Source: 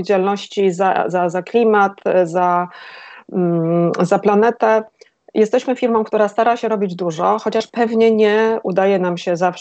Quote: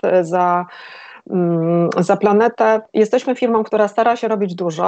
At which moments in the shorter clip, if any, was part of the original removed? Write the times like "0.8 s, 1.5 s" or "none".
2.9 s